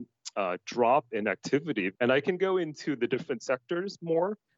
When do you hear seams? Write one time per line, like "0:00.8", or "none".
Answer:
0:02.0